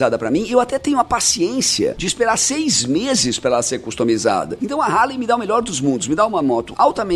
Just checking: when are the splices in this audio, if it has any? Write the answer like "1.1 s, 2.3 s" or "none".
none

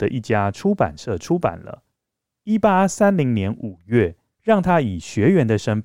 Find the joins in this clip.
4.3 s

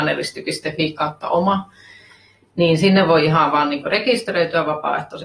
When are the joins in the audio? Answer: none

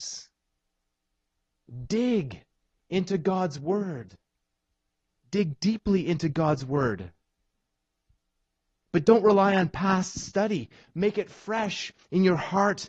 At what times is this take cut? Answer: none

